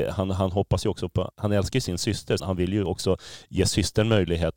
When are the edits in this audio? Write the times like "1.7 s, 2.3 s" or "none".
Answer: 1.3 s, 2.4 s